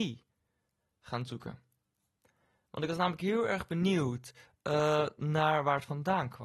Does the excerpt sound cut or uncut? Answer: uncut